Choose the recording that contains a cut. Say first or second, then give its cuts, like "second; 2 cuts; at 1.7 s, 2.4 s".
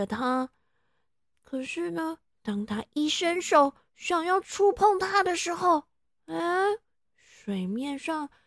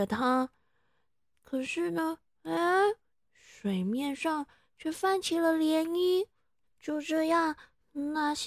second; 2 cuts; at 2.3 s, 6.6 s